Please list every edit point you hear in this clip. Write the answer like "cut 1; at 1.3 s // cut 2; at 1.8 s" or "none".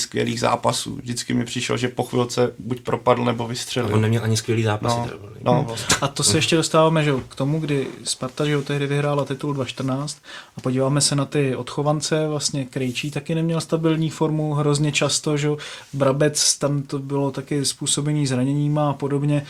none